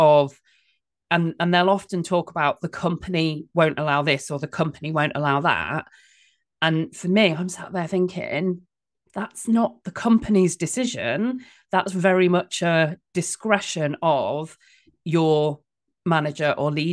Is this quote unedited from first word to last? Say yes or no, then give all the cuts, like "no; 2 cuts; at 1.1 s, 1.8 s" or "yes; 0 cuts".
yes; 0 cuts